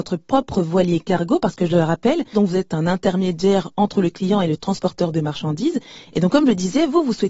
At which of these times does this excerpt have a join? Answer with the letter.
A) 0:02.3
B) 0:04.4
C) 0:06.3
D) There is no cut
A